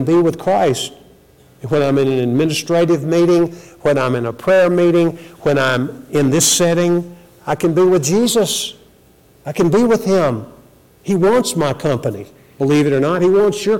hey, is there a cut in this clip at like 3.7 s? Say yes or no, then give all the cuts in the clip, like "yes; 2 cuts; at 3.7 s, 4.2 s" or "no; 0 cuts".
no; 0 cuts